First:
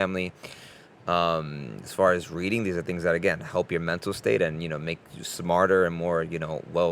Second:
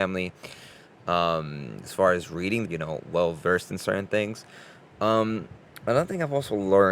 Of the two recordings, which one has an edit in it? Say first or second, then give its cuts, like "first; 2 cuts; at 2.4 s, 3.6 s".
second; 2 cuts; at 2.6 s, 4.9 s